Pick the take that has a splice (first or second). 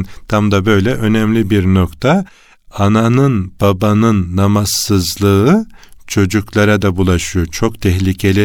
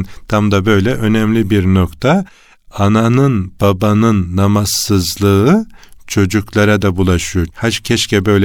second